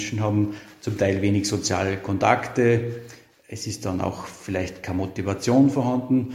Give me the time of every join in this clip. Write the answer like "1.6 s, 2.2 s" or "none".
none